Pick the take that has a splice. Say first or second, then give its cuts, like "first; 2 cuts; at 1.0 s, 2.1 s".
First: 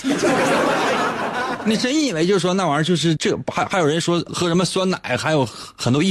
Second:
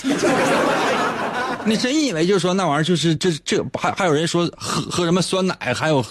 first; 2 cuts; at 3.2 s, 4.3 s